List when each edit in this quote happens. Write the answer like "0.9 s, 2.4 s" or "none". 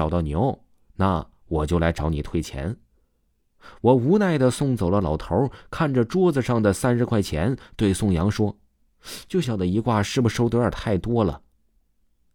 9.4 s